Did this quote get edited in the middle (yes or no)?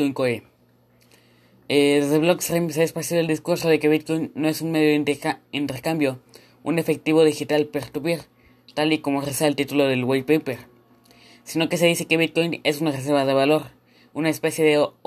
no